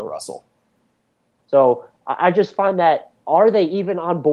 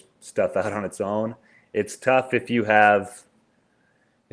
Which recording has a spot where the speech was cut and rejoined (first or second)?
first